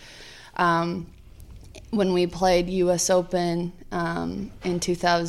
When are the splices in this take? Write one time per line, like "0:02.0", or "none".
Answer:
none